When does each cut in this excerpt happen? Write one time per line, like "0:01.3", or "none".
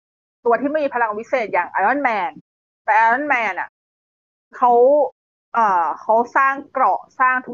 none